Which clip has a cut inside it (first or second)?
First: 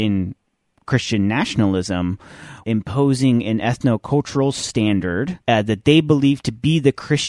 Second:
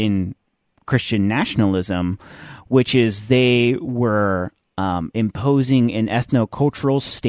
first